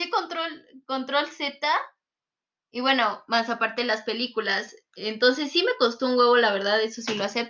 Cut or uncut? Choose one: uncut